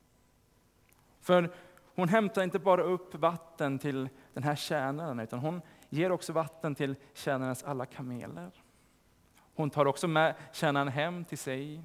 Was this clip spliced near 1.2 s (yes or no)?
yes